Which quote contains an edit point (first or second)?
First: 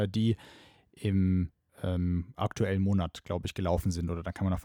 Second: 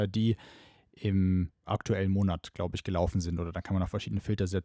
second